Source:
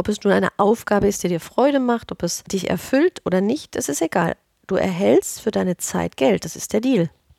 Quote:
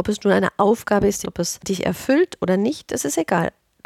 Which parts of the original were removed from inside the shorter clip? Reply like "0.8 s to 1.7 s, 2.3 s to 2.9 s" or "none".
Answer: 1.2 s to 2.1 s